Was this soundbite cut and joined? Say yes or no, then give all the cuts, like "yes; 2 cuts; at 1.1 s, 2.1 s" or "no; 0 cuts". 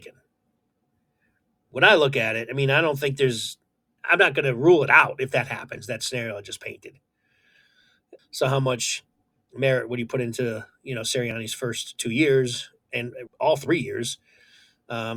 yes; 3 cuts; at 4.0 s, 8.2 s, 13.3 s